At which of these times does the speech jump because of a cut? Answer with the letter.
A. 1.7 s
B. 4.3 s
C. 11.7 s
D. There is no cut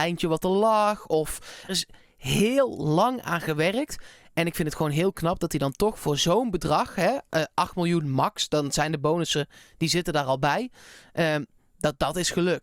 A